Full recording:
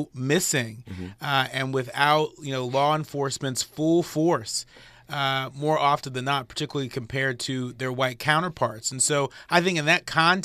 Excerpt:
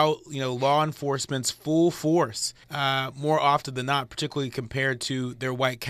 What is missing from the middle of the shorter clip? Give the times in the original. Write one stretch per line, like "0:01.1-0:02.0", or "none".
0:04.8-0:05.0

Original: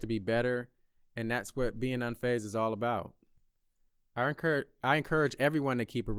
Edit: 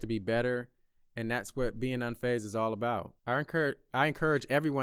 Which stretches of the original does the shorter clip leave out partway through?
0:03.2-0:04.1

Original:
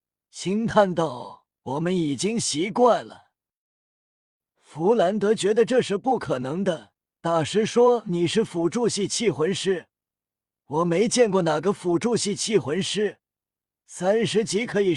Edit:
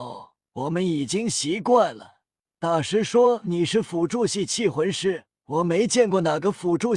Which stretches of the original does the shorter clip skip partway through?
0:03.5-0:07.1
0:10.0-0:10.6

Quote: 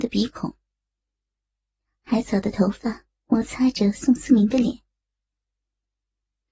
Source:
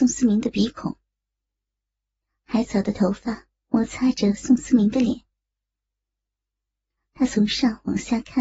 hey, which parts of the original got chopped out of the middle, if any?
none

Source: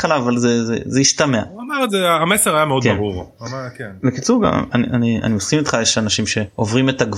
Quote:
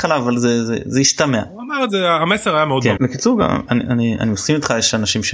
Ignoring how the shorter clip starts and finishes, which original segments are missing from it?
0:03.0-0:04.0

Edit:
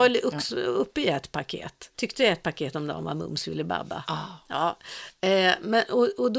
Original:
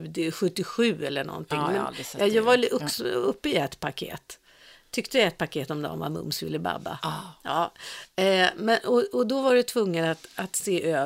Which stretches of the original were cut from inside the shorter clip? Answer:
0:04.4-0:04.9

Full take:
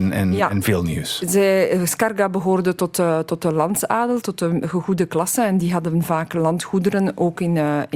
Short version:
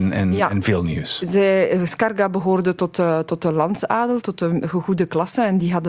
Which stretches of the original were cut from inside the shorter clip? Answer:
none

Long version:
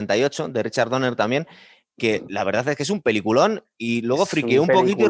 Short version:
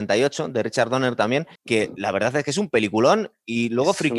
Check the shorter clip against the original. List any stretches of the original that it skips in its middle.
0:01.6-0:01.9

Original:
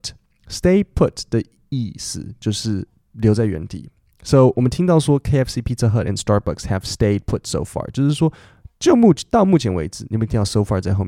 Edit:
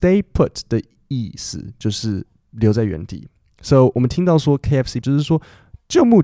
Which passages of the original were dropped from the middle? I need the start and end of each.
0:05.6-0:07.9

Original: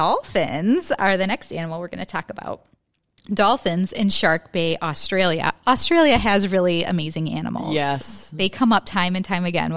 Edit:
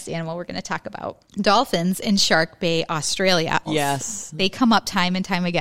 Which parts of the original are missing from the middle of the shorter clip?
0:02.7-0:03.2
0:05.6-0:07.7

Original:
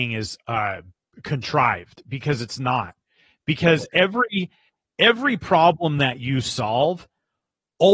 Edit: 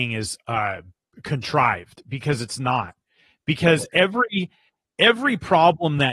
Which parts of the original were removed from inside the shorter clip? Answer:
none

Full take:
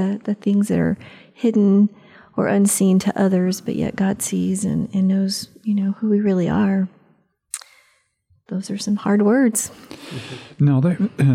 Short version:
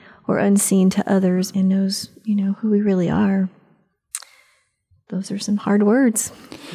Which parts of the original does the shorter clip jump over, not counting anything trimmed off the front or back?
0:03.6-0:04.9

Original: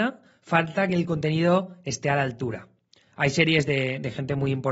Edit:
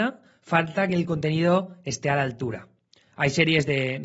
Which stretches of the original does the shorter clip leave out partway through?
none

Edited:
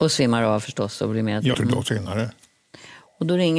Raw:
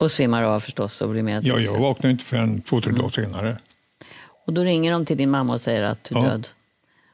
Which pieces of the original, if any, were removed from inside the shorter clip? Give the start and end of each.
0:01.5-0:02.8

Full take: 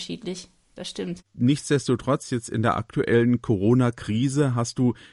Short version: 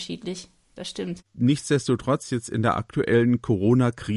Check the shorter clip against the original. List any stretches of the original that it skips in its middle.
none

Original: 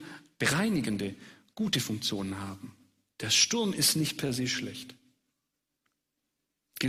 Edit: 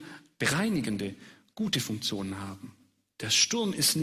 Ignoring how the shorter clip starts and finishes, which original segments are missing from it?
none

